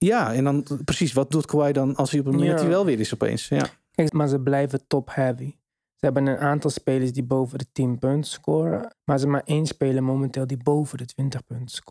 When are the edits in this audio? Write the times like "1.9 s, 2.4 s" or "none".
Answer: 4.1 s, 8.9 s